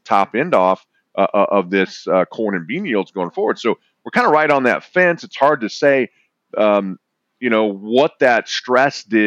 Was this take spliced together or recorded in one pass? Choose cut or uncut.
uncut